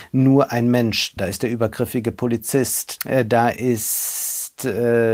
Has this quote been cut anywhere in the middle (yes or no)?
yes